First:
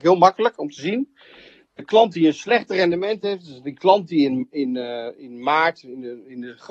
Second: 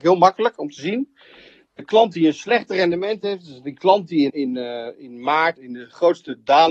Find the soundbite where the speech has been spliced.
second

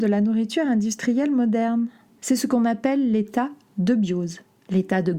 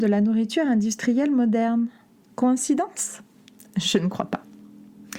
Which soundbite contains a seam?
first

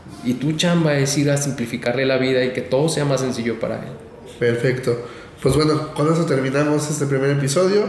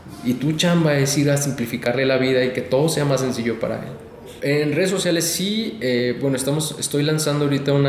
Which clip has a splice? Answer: second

